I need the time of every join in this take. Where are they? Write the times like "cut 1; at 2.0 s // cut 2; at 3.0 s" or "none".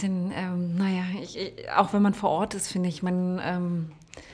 none